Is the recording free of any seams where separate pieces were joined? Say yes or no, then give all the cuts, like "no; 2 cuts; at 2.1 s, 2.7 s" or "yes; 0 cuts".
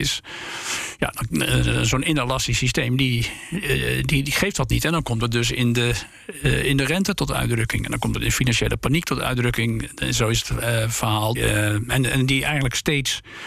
no; 2 cuts; at 1.3 s, 11.4 s